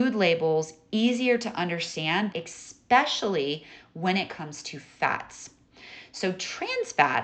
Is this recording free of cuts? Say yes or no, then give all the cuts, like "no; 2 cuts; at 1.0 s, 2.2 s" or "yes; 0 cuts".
no; 1 cut; at 2.3 s